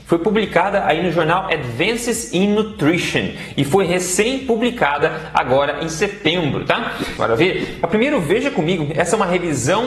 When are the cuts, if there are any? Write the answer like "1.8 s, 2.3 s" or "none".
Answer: 7.2 s